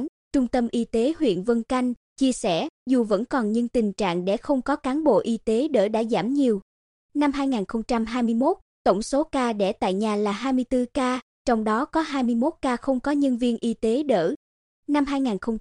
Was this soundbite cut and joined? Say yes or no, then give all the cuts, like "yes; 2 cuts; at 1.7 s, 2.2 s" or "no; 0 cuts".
no; 0 cuts